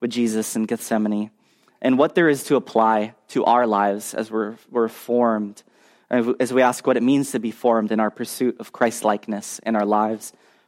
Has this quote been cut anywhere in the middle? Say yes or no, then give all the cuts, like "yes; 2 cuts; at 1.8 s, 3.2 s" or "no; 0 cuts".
no; 0 cuts